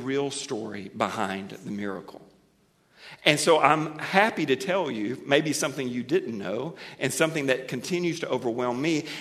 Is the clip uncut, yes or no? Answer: yes